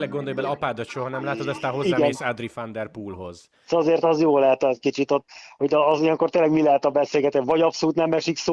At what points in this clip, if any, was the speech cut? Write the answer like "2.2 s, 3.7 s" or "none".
3.6 s